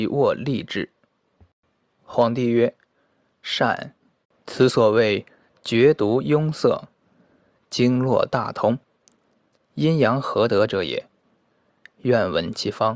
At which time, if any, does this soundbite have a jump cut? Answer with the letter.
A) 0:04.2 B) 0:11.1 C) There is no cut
C